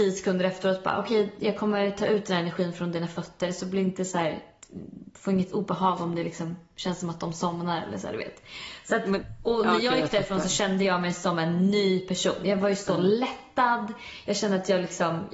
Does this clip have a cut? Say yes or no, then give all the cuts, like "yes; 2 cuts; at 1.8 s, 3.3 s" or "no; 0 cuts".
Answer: no; 0 cuts